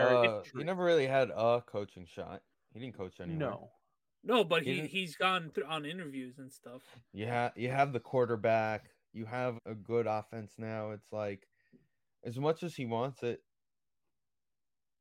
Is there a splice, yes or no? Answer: yes